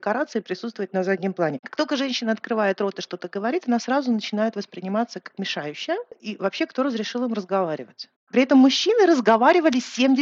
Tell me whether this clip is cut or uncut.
cut